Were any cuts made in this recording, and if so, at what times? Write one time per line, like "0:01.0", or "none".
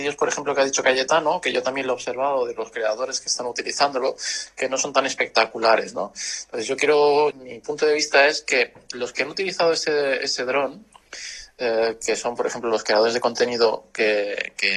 0:07.3